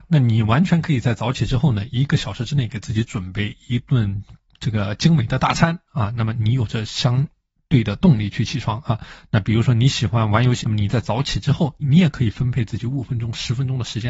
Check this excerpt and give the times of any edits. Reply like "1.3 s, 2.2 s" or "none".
10.6 s, 11.8 s